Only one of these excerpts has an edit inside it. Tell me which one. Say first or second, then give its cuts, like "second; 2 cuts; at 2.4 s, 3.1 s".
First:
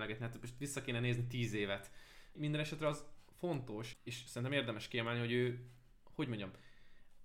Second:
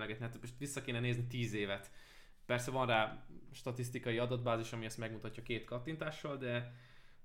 first; 2 cuts; at 2.4 s, 3.9 s